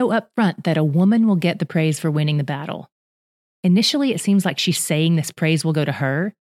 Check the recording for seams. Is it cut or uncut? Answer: uncut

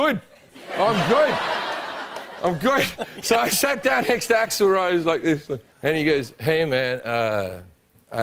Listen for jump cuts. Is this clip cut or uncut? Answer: cut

